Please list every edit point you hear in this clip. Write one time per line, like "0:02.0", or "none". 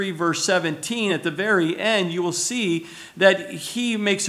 none